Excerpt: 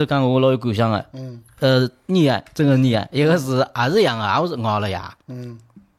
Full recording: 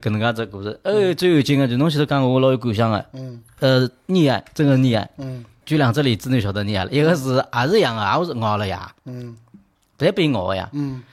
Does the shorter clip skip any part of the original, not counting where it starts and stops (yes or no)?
yes